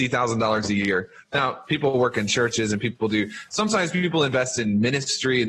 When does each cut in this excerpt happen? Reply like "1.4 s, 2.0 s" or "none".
none

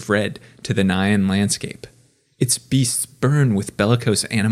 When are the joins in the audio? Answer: 2.2 s

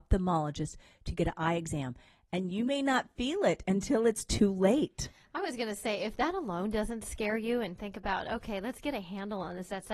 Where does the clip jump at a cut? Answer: none

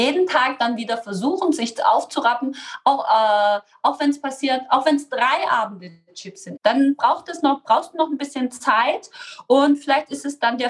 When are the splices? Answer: 6.6 s

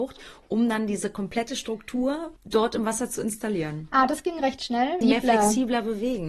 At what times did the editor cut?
2.4 s, 5.0 s

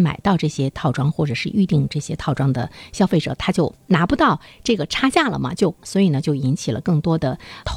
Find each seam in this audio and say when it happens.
none

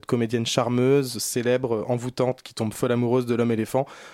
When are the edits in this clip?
none

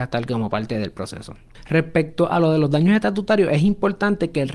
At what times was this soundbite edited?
none

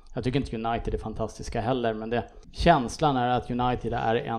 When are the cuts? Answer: 2.4 s

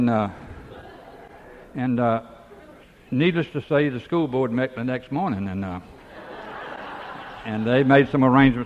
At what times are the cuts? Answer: none

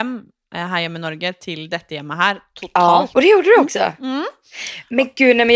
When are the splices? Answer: 3.1 s

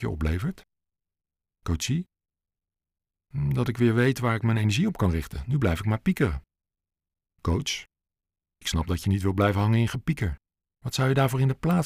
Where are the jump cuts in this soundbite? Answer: none

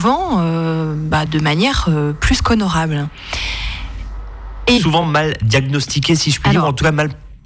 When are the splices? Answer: 1.3 s, 4.8 s

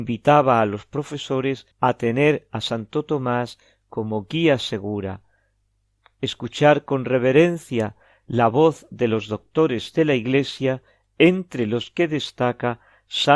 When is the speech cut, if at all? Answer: 1.7 s

